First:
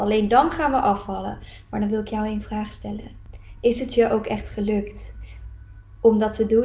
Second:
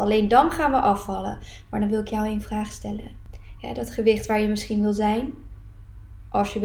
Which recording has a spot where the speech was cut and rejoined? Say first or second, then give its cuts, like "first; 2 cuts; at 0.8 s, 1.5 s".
second; 1 cut; at 3.6 s